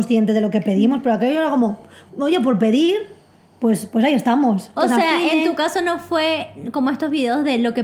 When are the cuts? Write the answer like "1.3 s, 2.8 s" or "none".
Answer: 2.1 s, 4.8 s

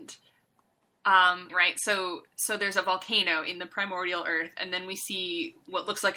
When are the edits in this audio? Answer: 1.5 s

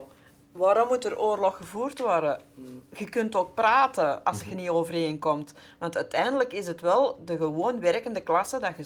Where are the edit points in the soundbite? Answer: none

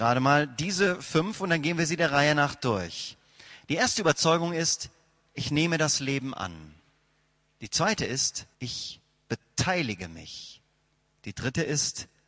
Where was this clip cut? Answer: 8.5 s

